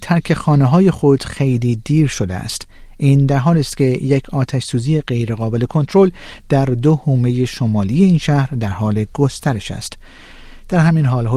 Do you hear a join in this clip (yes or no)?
no